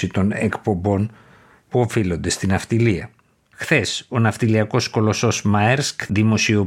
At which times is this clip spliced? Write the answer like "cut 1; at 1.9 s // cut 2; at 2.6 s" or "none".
cut 1; at 3.5 s